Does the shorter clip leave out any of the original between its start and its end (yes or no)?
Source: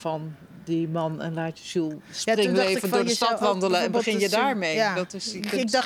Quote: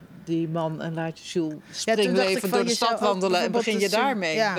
no